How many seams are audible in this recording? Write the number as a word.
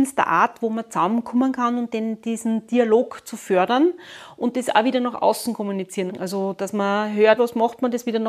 two